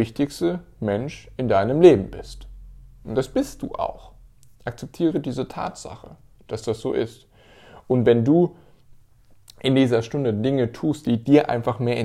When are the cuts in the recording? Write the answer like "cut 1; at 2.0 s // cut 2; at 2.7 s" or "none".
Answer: none